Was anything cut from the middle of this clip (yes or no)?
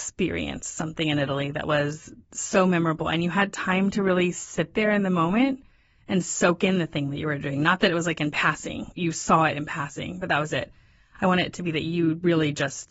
yes